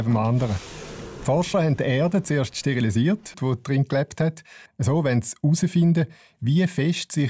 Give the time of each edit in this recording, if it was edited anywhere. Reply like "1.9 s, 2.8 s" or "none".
3.3 s, 4.7 s